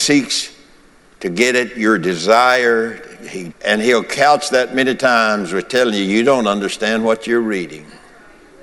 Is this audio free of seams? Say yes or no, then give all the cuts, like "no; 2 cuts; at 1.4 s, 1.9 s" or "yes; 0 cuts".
no; 1 cut; at 3.5 s